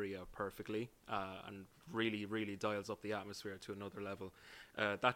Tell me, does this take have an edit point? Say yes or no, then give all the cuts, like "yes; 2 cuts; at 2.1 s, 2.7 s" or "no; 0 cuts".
no; 0 cuts